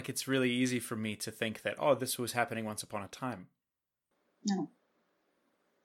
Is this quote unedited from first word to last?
yes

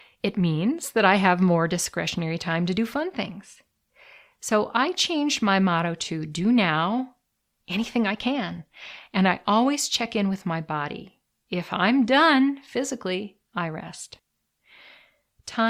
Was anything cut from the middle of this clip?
yes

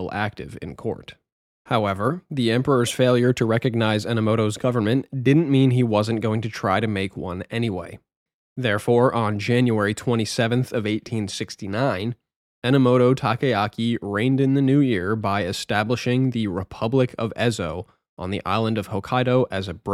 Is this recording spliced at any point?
no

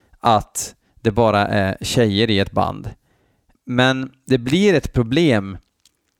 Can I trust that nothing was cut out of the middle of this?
no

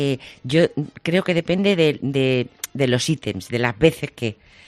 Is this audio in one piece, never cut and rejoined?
yes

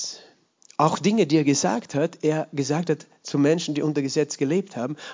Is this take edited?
no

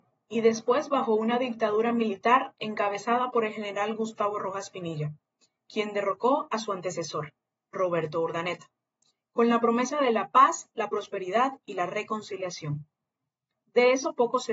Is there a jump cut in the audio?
no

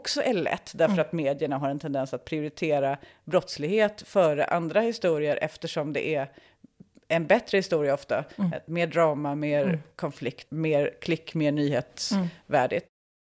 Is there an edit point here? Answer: yes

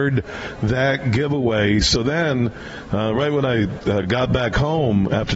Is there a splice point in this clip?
no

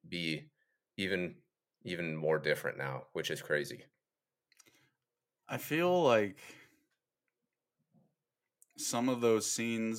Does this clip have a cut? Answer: no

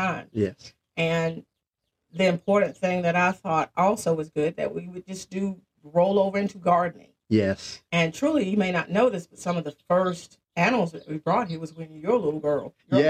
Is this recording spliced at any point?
no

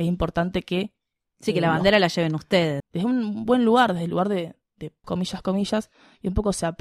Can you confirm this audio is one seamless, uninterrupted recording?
no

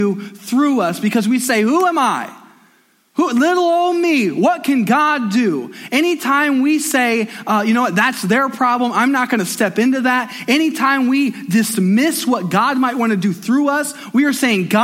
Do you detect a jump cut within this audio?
no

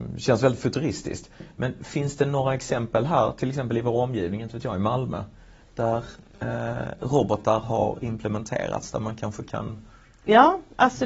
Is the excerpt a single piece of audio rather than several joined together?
yes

